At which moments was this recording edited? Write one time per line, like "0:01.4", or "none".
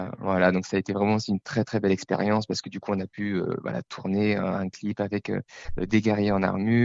none

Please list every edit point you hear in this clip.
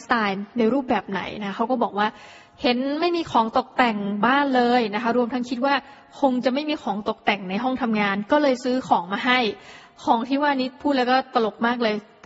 none

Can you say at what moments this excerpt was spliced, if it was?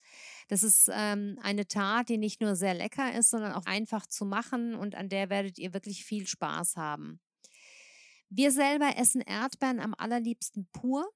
0:03.6

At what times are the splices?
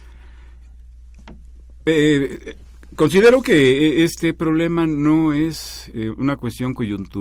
none

